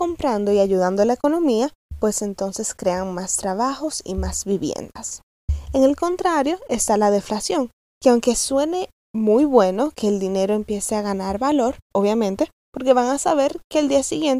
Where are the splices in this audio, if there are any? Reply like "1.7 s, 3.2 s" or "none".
11.9 s